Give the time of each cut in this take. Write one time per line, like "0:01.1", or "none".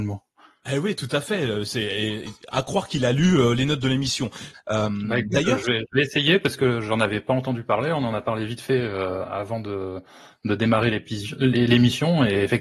0:04.5